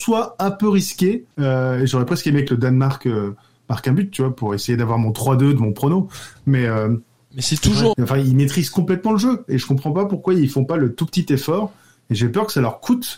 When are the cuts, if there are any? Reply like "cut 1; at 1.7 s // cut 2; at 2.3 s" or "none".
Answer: cut 1; at 1.3 s // cut 2; at 7.9 s